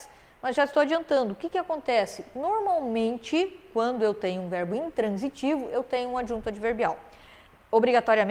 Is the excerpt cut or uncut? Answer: uncut